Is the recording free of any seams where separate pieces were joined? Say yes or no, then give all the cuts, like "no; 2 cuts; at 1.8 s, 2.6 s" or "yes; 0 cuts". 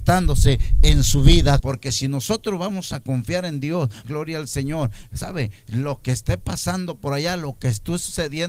no; 2 cuts; at 1.6 s, 4.0 s